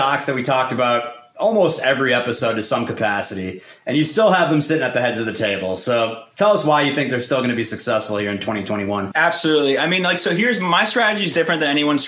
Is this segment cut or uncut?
uncut